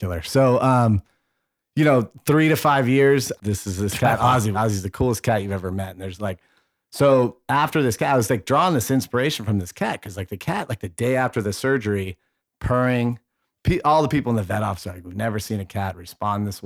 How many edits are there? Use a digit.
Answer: 2